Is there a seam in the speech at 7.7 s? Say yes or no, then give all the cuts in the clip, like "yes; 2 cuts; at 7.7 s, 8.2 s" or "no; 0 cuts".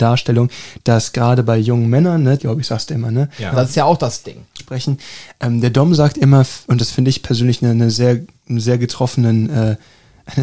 no; 3 cuts; at 2.4 s, 3.5 s, 4.6 s